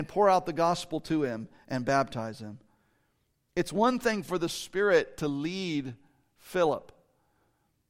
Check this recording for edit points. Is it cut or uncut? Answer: uncut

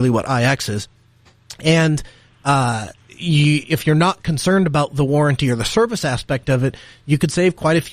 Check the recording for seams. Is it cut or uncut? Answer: cut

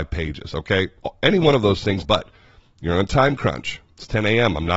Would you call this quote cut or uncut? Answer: cut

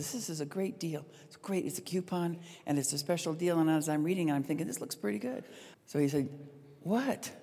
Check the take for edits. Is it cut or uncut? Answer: cut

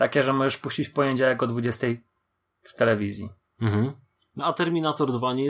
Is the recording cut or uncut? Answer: uncut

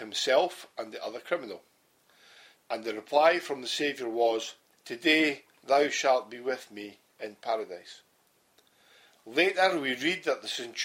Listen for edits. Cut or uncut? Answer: cut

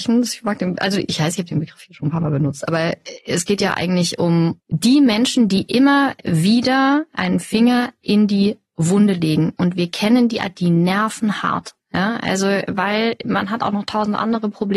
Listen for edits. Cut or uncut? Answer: uncut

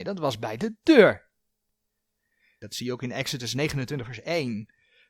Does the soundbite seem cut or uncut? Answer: cut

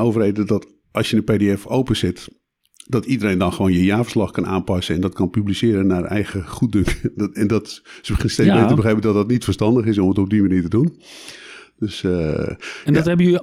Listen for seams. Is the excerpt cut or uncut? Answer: uncut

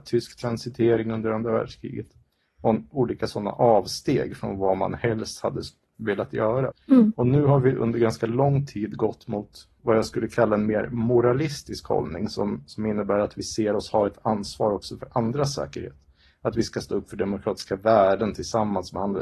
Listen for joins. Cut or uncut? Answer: cut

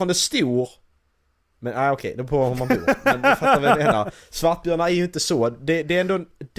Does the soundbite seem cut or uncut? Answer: uncut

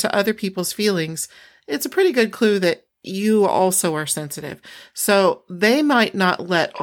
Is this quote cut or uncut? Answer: uncut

